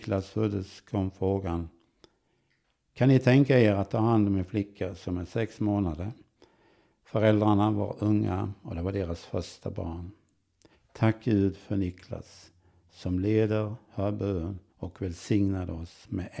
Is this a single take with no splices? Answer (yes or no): no